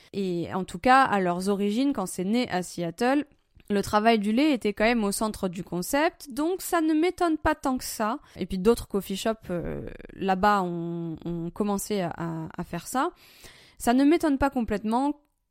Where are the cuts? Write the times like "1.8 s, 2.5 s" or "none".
none

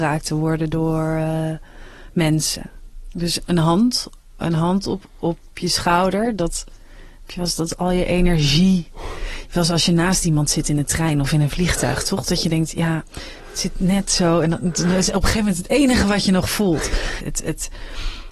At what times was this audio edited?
17.2 s

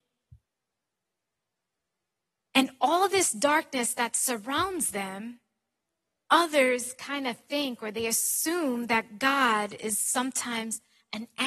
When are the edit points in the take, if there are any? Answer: none

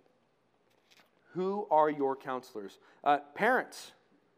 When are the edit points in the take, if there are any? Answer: none

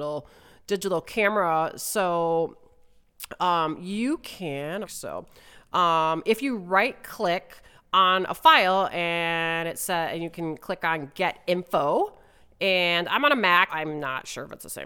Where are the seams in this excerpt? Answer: 4.8 s, 13.7 s

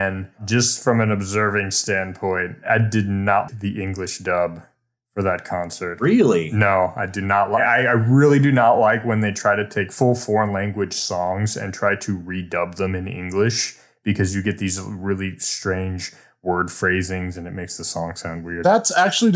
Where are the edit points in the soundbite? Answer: 3.5 s

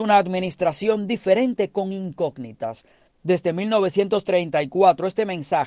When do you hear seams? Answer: 3.1 s

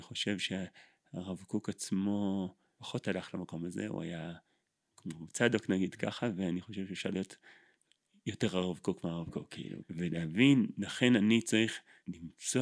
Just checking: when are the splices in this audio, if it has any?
9.8 s

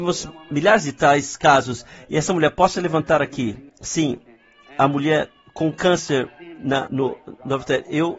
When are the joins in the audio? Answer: 3.7 s, 6.9 s

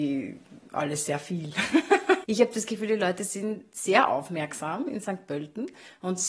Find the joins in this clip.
2.2 s

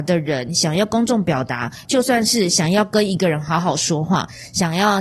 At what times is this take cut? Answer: 1.8 s

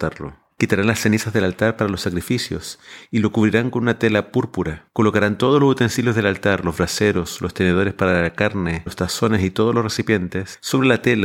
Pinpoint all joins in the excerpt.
8.9 s

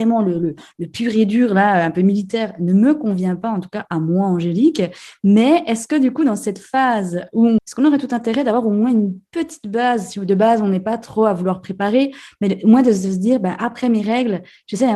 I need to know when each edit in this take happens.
7.6 s

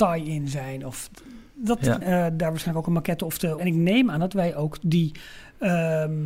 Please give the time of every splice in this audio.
2.0 s, 3.6 s

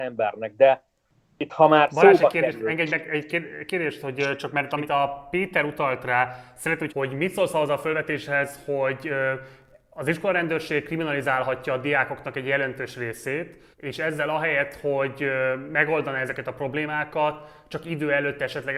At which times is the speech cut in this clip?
6.9 s, 13.7 s

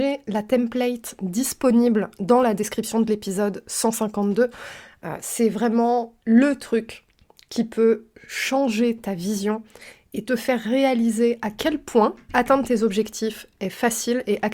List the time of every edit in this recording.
6.2 s, 12.3 s

